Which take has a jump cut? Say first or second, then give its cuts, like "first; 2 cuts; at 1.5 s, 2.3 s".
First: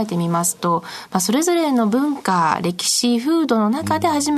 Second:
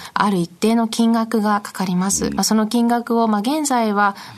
second; 1 cut; at 2.4 s